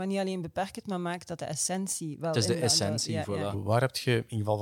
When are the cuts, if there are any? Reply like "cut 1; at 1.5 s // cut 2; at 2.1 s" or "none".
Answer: cut 1; at 3.5 s